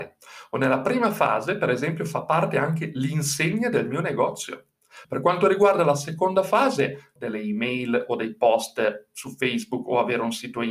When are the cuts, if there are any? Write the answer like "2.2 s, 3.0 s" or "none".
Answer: 5.0 s, 7.2 s